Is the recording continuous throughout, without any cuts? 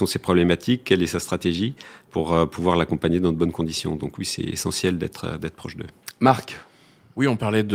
yes; 0 cuts

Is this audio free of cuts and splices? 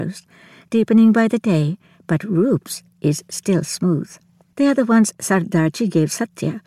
no; 1 cut; at 4.5 s

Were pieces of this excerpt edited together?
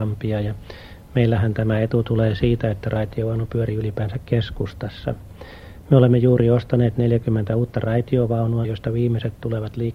yes; 1 cut; at 8.6 s

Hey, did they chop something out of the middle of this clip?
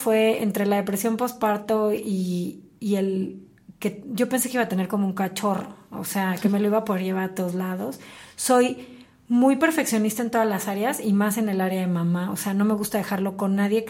no; 0 cuts

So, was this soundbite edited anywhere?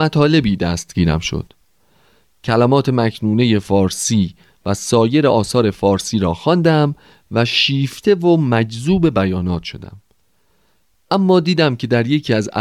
no; 0 cuts

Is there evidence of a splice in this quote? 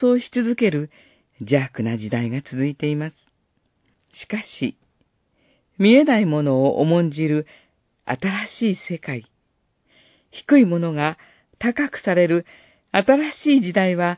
yes; 1 cut; at 3.9 s

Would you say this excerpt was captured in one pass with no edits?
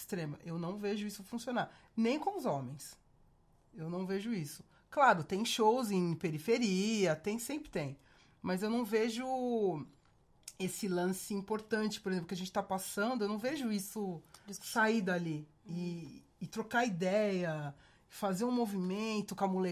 yes; 0 cuts

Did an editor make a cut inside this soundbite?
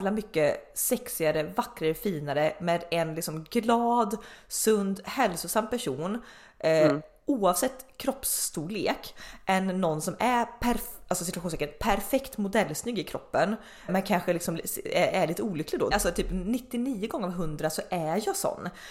yes; 2 cuts; at 13.9 s, 15.9 s

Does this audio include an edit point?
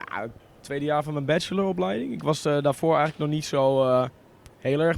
no; 0 cuts

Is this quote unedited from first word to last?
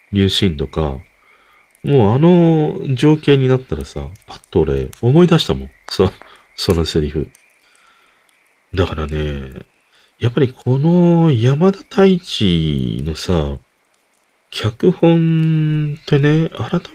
yes; 0 cuts

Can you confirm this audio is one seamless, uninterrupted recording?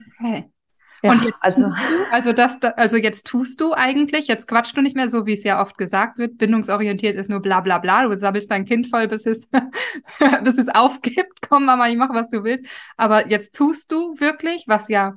yes; 0 cuts

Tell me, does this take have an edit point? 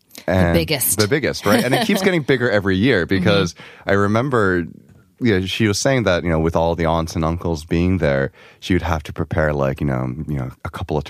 no; 0 cuts

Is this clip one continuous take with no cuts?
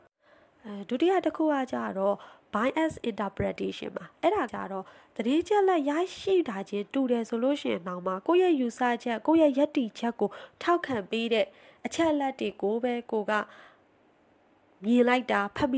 no; 1 cut; at 4.5 s

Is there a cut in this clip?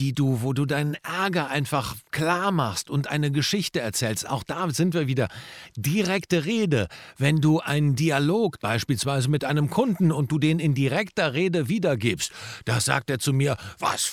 yes; 1 cut; at 8.6 s

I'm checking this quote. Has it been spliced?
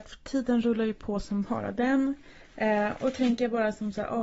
no; 0 cuts

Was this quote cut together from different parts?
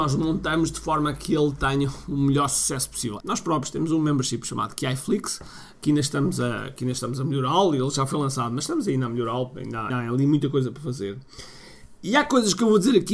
yes; 2 cuts; at 3.2 s, 9.9 s

